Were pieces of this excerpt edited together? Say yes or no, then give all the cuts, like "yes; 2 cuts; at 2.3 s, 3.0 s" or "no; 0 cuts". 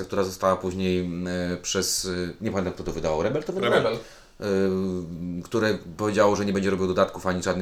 no; 0 cuts